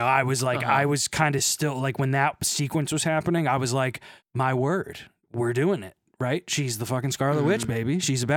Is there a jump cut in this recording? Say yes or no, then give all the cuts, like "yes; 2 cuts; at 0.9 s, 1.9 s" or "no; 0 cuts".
no; 0 cuts